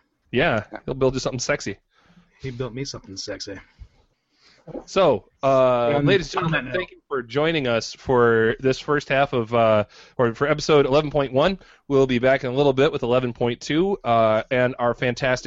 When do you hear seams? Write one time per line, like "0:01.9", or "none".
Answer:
none